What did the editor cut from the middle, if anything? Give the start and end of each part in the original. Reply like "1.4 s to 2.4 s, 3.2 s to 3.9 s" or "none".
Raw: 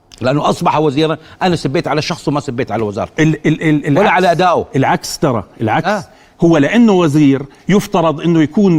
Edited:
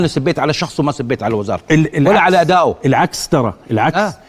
3.4 s to 3.8 s